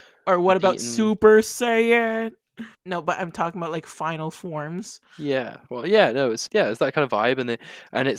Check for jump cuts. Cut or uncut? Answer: cut